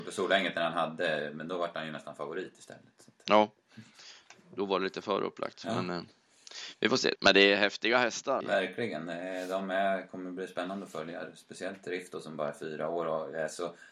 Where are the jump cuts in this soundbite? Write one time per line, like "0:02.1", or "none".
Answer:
0:07.2
0:08.4